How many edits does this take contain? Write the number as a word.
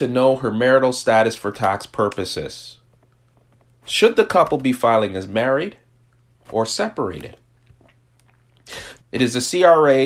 one